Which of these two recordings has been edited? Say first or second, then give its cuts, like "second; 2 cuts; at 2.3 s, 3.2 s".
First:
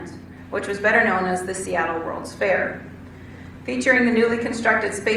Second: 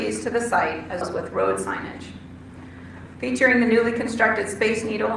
second; 2 cuts; at 1.0 s, 3.1 s